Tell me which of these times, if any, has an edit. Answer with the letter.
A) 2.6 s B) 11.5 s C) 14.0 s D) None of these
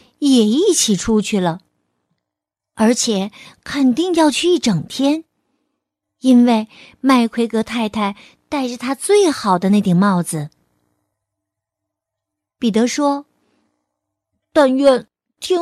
D